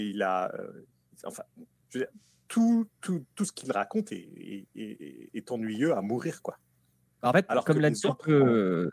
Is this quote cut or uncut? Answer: uncut